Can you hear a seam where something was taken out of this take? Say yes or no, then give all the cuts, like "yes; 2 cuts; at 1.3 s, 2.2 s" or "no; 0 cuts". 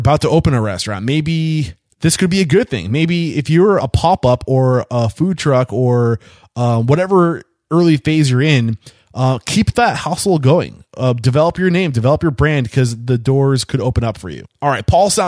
yes; 1 cut; at 3.8 s